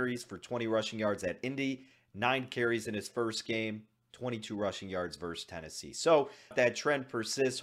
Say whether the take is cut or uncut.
cut